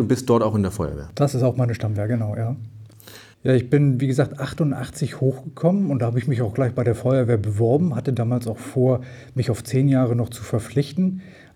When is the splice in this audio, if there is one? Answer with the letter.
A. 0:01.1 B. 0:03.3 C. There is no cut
B